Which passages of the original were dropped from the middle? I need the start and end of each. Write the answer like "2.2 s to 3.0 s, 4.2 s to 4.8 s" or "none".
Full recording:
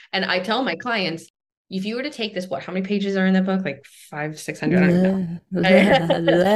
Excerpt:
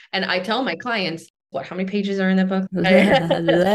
1.5 s to 2.5 s, 3.6 s to 5.5 s